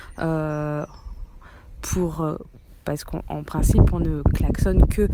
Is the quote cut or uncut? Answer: uncut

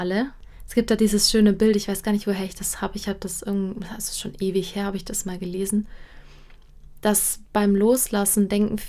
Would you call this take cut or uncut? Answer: uncut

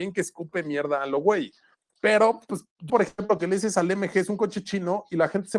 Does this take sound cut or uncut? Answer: cut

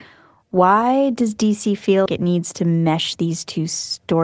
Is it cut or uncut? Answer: cut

